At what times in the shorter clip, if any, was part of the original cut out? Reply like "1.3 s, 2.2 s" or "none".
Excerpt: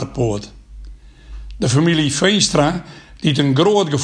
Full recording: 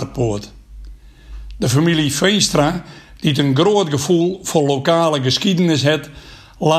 none